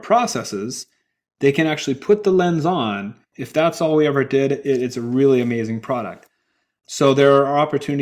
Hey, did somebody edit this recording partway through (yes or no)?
yes